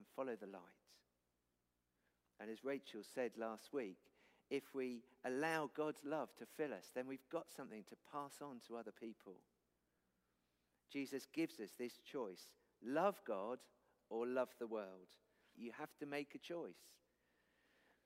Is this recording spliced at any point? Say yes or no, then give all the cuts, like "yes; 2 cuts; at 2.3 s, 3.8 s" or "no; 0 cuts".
yes; 1 cut; at 15.5 s